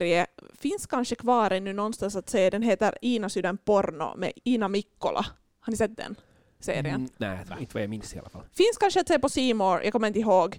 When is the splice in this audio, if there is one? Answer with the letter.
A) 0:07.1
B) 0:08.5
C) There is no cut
A